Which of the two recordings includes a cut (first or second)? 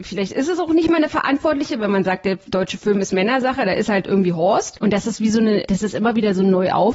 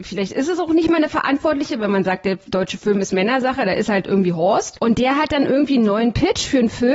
first